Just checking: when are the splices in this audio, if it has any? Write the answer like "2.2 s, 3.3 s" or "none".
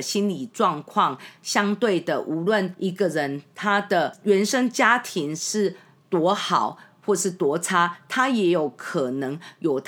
none